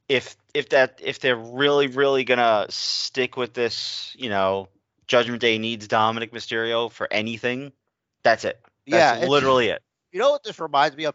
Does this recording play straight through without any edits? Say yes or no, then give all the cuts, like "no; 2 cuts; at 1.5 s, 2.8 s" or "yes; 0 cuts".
yes; 0 cuts